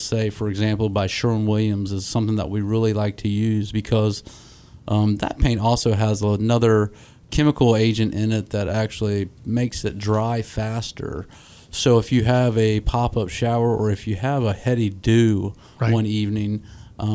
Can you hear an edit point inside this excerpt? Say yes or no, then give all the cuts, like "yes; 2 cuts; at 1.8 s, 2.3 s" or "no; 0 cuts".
no; 0 cuts